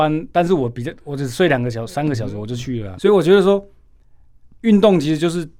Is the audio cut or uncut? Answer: cut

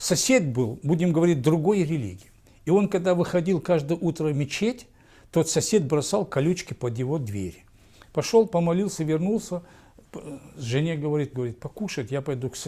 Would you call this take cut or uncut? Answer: cut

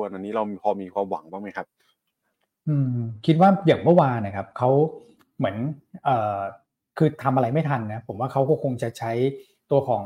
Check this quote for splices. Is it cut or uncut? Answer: uncut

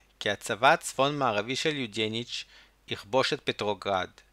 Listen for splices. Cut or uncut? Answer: uncut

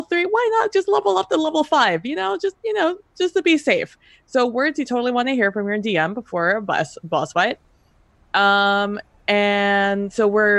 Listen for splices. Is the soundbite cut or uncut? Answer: uncut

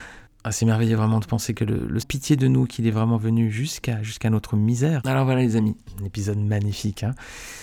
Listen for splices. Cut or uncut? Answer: cut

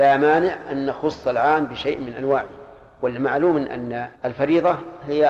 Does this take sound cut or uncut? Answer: cut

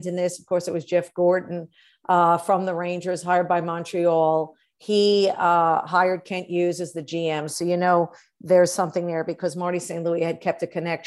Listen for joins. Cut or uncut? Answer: uncut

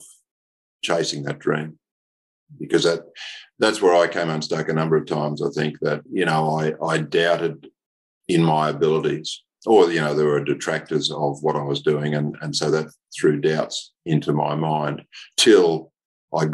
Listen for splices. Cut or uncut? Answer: uncut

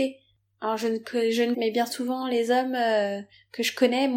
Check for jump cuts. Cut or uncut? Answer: cut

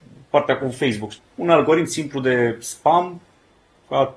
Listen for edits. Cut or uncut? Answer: cut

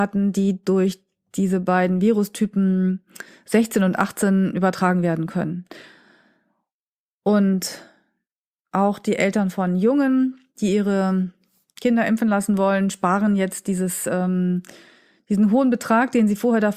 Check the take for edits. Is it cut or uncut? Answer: uncut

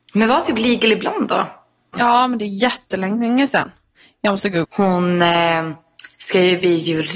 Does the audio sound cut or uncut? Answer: cut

